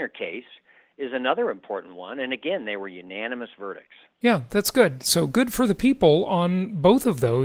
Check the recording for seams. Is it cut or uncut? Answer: uncut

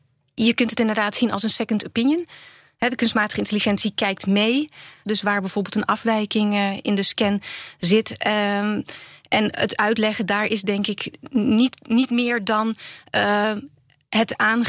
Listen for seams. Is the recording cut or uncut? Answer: cut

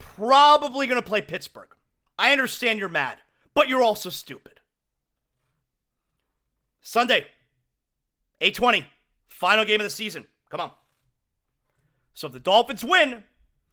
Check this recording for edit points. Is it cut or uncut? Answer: cut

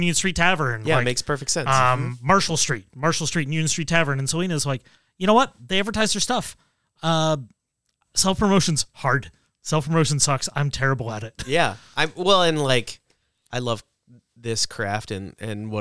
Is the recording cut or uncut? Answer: uncut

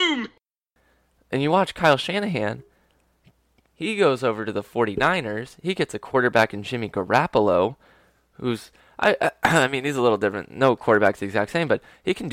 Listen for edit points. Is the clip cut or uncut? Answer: uncut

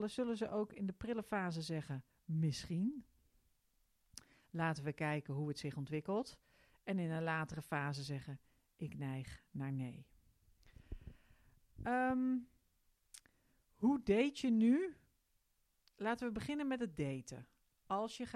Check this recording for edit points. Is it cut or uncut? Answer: uncut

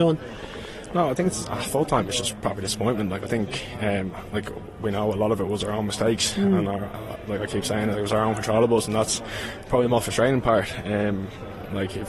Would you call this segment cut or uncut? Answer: uncut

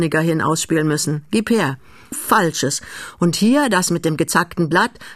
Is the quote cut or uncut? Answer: cut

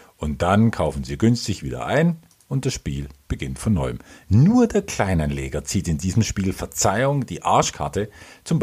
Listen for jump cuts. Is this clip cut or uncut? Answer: uncut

